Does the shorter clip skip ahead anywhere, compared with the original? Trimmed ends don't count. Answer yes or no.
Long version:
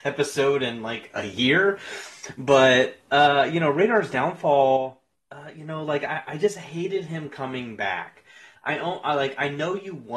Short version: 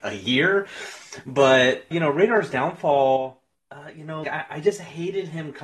yes